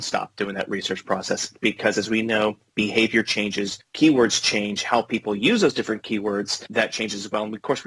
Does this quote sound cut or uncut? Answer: uncut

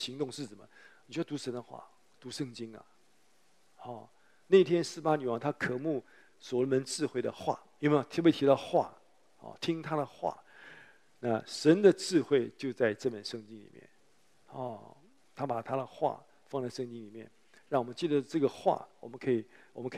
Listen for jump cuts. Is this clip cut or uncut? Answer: uncut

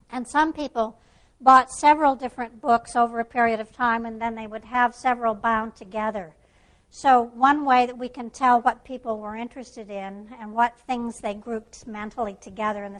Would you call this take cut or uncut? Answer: uncut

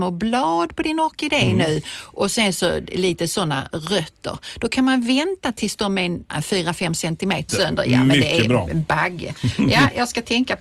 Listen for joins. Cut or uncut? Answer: cut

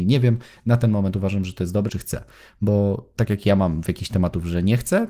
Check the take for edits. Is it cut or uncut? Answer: cut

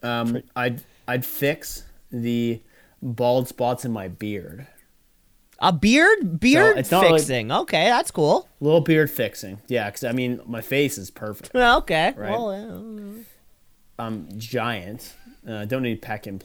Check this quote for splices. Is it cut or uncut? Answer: uncut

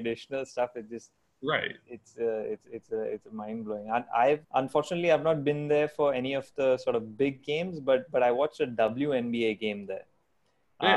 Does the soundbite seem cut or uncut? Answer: cut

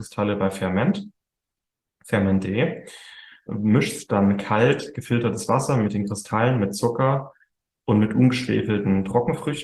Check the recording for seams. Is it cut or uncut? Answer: cut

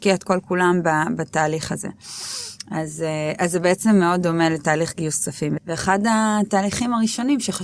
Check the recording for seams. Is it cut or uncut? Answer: cut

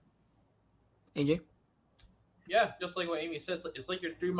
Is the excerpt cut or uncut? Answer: cut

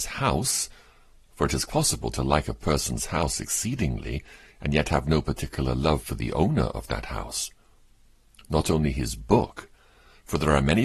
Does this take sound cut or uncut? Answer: cut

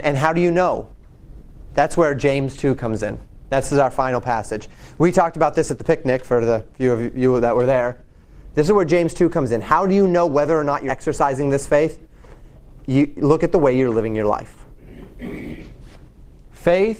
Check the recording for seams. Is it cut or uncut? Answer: cut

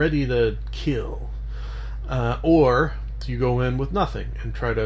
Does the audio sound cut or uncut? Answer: uncut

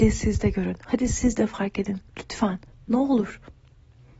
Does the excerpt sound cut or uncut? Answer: uncut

